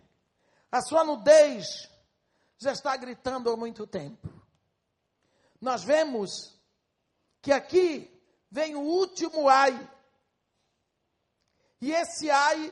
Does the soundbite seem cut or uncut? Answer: uncut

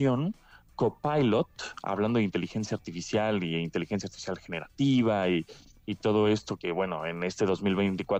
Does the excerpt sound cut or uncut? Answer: cut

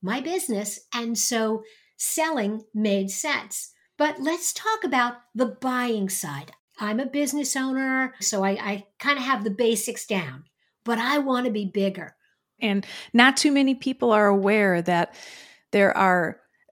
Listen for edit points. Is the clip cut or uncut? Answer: cut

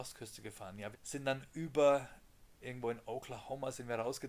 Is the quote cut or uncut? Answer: cut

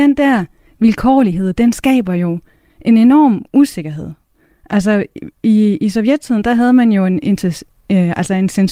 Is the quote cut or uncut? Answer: uncut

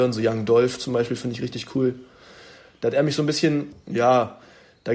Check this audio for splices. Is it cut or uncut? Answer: cut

